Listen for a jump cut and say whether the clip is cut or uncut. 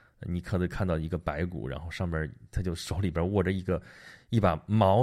uncut